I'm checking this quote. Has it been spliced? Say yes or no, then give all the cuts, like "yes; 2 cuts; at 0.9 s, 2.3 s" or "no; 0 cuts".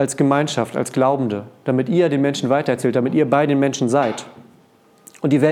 no; 0 cuts